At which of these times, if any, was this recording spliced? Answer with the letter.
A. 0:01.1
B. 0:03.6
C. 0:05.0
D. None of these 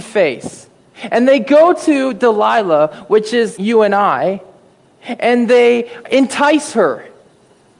B